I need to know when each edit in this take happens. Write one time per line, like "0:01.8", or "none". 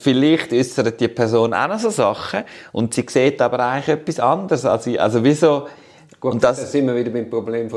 none

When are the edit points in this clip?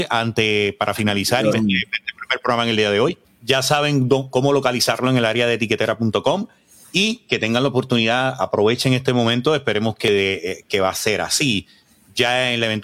0:01.5
0:03.2

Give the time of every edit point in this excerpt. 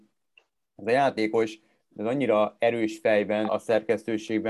0:03.5

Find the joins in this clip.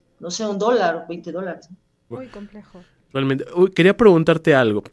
0:02.1

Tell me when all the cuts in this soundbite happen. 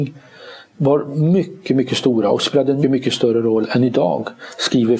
0:02.8

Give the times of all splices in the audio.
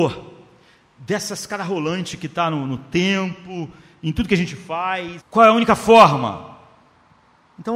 0:05.2

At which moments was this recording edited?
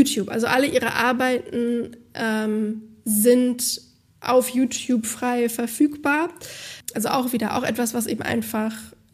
0:06.9

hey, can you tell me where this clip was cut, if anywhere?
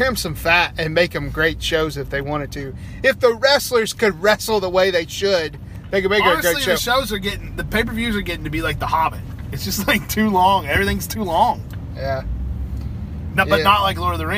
none

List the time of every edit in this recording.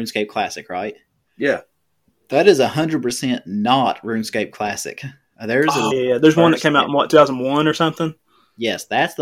0:05.9

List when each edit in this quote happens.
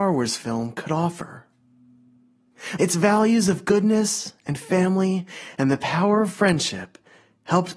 0:02.8

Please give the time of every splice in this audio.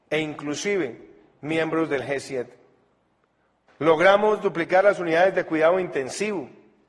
0:03.7

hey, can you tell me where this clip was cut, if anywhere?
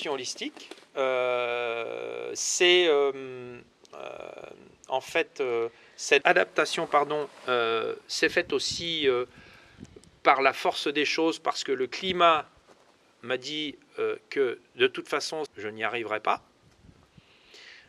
0:06.2
0:15.5

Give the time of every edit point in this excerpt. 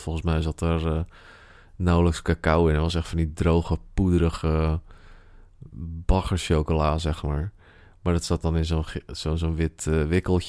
none

